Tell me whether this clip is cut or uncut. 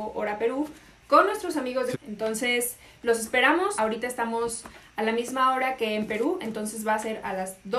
cut